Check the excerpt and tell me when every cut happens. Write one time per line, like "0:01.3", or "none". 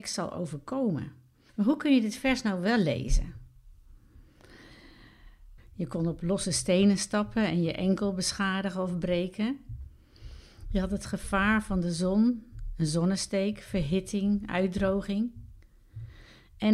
0:01.5
0:05.6